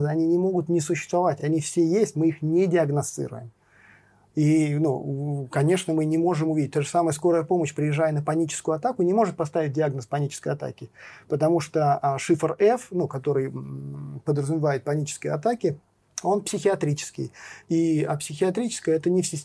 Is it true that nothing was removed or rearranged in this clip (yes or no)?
yes